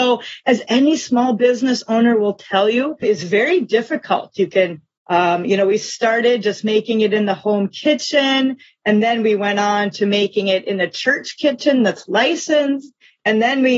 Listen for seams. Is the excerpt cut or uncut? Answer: cut